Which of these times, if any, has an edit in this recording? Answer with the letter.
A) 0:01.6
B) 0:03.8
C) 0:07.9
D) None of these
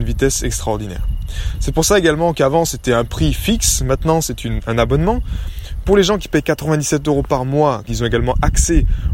C